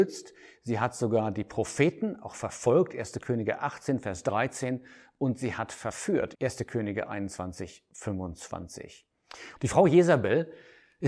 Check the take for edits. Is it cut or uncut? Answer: cut